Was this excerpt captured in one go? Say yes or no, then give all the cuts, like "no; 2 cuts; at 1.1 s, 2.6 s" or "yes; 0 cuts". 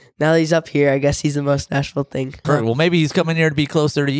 no; 1 cut; at 2.4 s